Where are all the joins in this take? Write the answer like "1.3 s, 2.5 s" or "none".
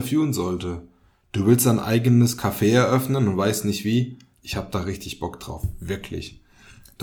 4.4 s